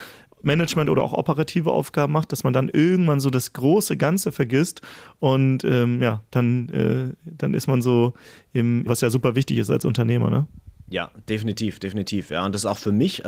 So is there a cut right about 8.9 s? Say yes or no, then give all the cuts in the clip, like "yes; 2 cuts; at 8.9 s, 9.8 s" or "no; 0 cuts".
yes; 1 cut; at 8.9 s